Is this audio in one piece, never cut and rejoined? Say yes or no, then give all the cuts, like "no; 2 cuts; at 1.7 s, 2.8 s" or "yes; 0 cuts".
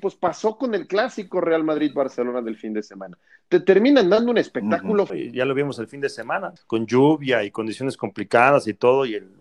no; 2 cuts; at 5.1 s, 6.6 s